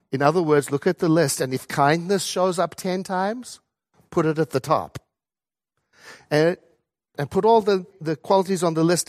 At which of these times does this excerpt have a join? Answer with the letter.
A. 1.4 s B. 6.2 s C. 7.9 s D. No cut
C